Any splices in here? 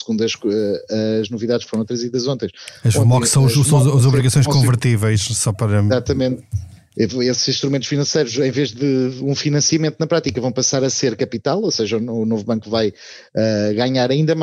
no; 0 cuts

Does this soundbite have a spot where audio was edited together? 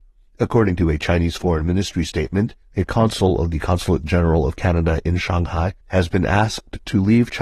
yes; 2 cuts; at 2.6 s, 5.8 s

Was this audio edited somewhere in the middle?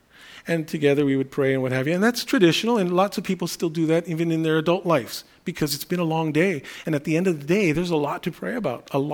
no; 0 cuts

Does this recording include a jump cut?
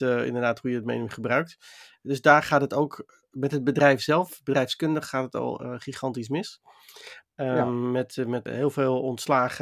yes; 2 cuts; at 7.2 s, 8.5 s

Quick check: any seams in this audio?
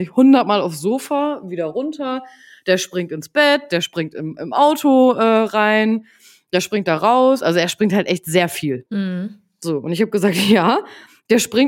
yes; 1 cut; at 8.9 s

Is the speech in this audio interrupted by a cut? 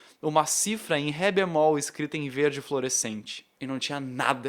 yes; 1 cut; at 3.6 s

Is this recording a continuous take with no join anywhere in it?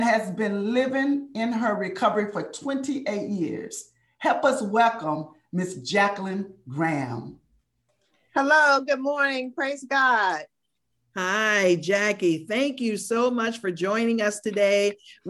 yes; 0 cuts

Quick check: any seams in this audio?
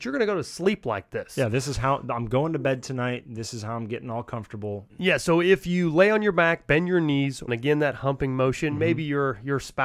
yes; 2 cuts; at 4.9 s, 7.5 s

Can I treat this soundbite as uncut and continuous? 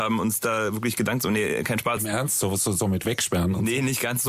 no; 1 cut; at 2.0 s

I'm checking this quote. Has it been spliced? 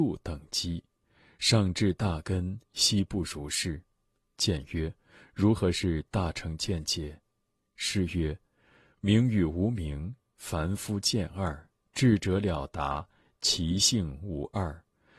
no; 0 cuts

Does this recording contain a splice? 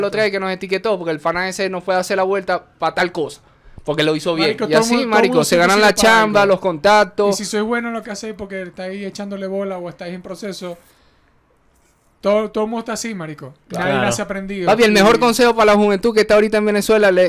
no; 0 cuts

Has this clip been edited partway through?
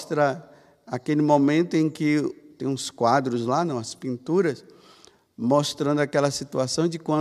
no; 0 cuts

